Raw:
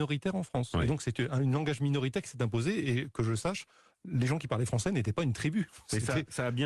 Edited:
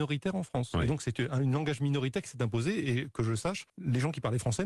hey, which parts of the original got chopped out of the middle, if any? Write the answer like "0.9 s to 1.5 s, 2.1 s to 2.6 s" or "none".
3.7 s to 4.0 s

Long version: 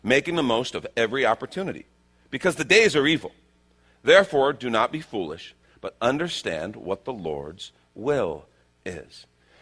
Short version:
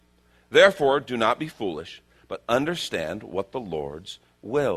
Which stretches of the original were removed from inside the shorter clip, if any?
none

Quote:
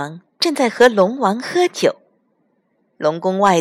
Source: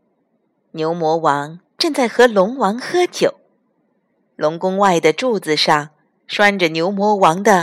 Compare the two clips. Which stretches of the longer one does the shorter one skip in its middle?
none

